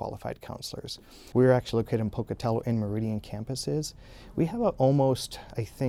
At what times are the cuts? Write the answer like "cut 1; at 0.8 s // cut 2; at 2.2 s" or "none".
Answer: cut 1; at 1.3 s